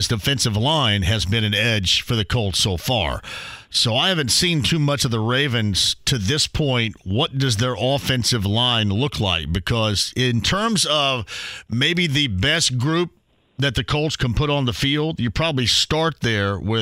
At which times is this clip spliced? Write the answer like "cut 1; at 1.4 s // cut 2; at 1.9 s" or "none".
none